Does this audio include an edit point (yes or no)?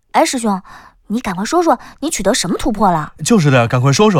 no